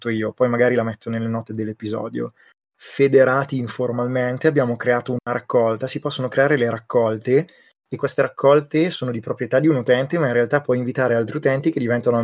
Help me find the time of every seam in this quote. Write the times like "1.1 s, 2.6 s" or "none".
2.6 s